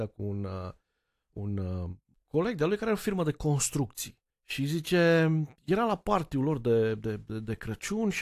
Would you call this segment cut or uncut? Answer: uncut